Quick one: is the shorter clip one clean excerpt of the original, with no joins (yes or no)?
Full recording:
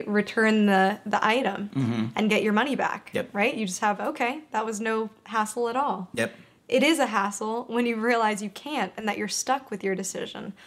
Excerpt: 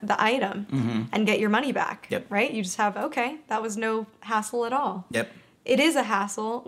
yes